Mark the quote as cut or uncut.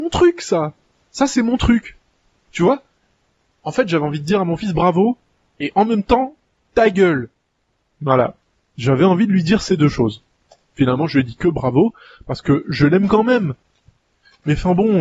uncut